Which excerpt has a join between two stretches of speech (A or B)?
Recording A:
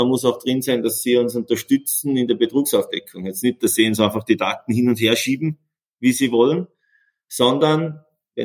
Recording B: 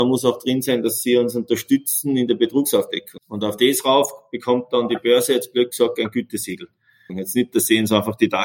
B